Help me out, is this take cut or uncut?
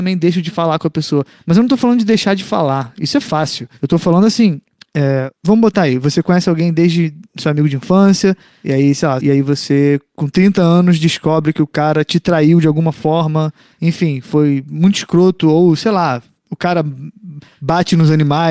cut